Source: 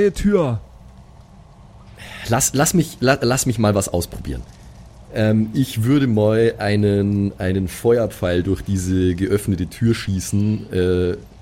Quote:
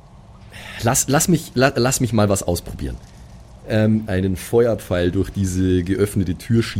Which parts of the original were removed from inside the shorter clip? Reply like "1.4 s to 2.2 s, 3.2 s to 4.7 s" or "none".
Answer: 5.5 s to 7.4 s